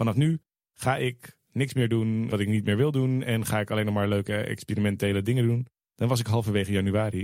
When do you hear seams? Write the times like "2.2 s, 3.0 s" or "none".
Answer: 2.3 s